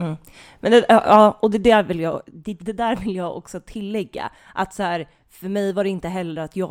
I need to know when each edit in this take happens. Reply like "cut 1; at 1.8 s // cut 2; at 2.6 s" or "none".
cut 1; at 2.6 s